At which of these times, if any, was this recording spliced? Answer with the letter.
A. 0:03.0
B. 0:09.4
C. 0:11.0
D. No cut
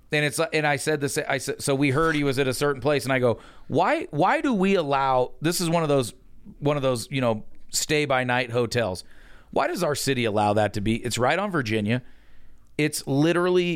D